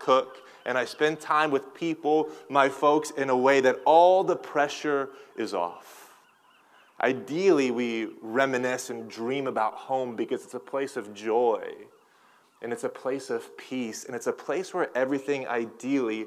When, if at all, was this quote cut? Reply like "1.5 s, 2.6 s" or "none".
none